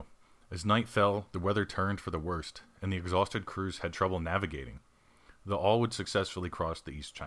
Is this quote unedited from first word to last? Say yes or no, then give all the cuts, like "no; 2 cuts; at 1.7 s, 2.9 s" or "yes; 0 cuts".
yes; 0 cuts